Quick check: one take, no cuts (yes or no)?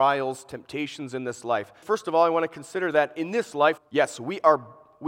no